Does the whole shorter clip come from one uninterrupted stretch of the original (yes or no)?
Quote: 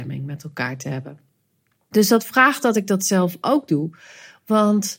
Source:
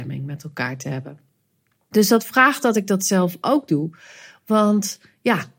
yes